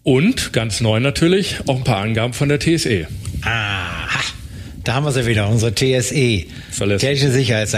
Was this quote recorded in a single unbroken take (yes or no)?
yes